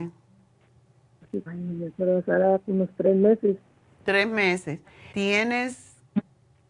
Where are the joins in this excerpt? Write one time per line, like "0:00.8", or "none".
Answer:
0:01.5
0:05.1